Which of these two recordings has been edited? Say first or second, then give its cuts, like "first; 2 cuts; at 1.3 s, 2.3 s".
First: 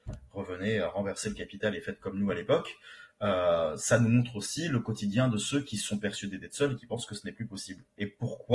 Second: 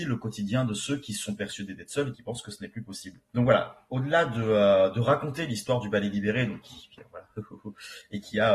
second; 2 cuts; at 3.3 s, 7.0 s